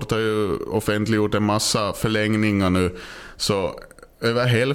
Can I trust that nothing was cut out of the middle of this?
yes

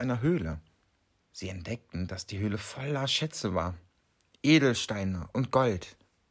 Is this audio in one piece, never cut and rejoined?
no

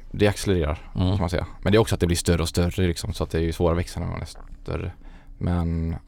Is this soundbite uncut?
yes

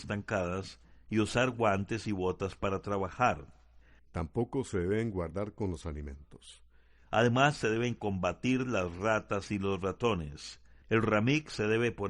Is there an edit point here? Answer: yes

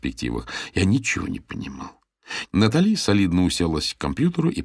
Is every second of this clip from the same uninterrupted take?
no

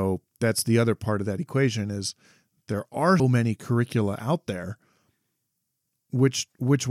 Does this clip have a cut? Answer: yes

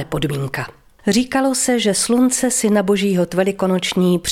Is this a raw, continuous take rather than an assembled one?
no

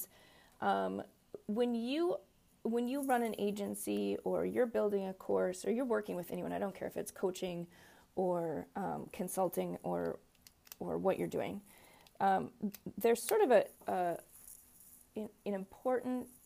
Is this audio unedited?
no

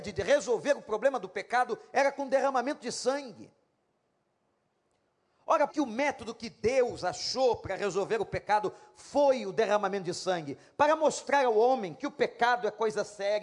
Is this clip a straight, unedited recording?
no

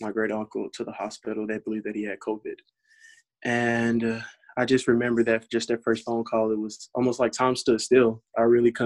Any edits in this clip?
no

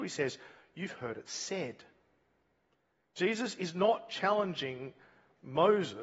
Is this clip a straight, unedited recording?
yes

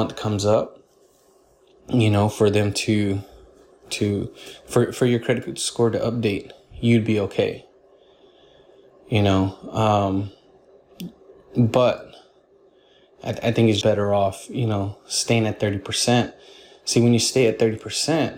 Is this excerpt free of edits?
no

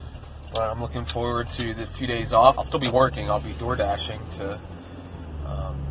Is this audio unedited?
no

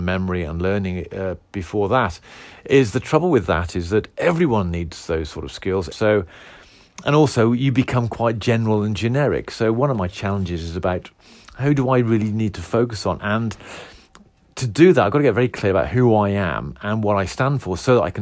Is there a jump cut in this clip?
yes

